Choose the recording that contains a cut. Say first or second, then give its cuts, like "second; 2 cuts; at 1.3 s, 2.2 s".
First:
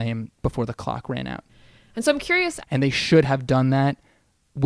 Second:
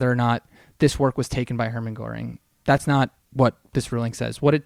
first; 1 cut; at 2.6 s